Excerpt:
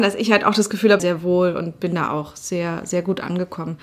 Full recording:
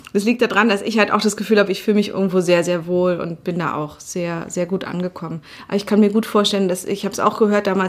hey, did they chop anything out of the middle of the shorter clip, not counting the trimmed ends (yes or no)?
yes